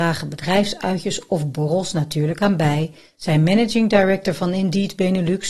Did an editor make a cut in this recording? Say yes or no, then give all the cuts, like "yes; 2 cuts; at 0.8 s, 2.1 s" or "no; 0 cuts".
no; 0 cuts